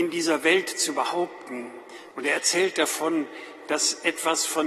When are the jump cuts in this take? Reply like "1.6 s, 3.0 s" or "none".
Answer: 2.1 s